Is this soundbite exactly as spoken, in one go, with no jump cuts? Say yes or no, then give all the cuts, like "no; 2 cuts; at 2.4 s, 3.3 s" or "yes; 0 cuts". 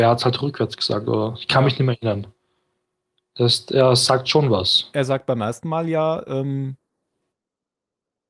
yes; 0 cuts